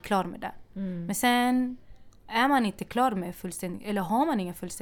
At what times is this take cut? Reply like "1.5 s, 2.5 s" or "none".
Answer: none